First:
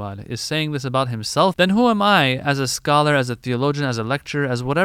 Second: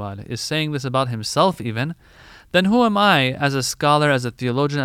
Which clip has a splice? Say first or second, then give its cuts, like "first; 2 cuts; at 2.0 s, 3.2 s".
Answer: first; 1 cut; at 1.5 s